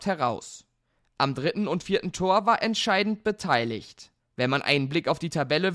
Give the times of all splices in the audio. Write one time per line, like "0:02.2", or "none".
0:02.6
0:04.2